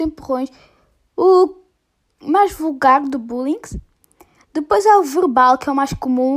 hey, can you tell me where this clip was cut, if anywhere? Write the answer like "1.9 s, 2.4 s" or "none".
none